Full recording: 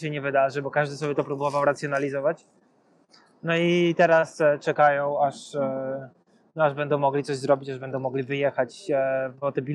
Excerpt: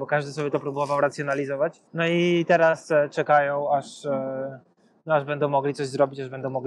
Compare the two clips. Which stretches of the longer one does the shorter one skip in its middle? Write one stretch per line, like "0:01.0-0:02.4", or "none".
0:02.5-0:03.4